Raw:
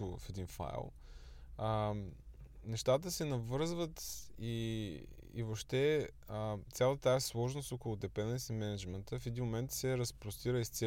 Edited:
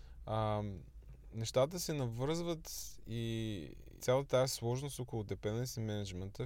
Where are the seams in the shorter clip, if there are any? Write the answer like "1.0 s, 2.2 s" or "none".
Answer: 4.0 s